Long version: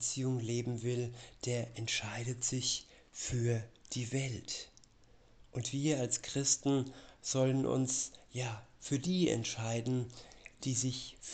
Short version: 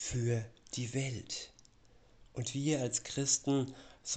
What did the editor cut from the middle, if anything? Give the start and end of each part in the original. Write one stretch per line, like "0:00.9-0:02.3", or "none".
none